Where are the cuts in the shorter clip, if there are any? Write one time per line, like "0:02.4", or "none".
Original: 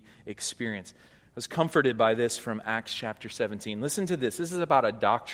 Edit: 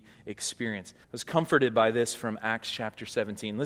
0:01.0